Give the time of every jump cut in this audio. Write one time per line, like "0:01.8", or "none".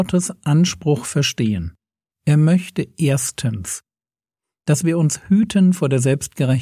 0:02.1